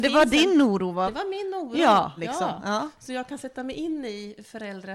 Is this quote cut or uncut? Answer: cut